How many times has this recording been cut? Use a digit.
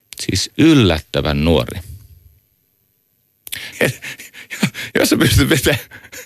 2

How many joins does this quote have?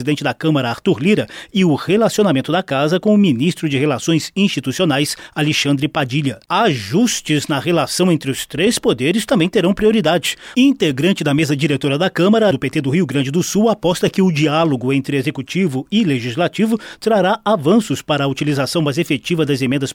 3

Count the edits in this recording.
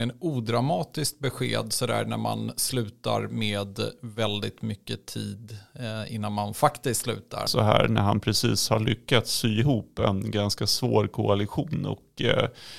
1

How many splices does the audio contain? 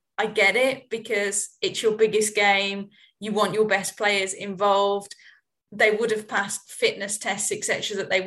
0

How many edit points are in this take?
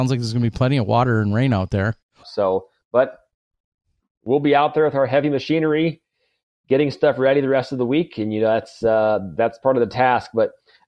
1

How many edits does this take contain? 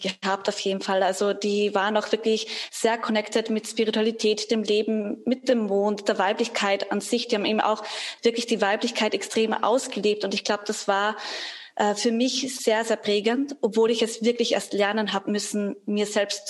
0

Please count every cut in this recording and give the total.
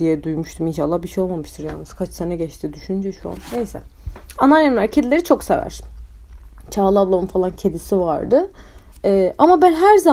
1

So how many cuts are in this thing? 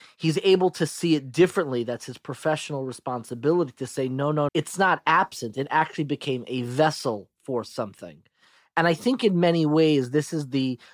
1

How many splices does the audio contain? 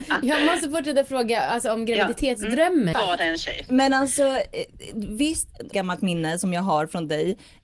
2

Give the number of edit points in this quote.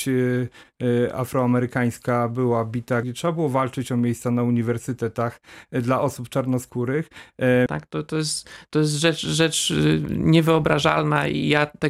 2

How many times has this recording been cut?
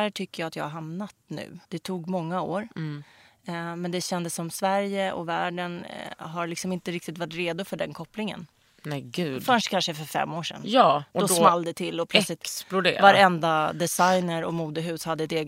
1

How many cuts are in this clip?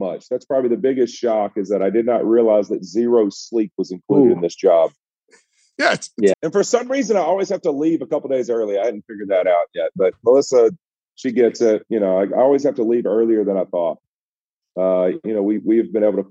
2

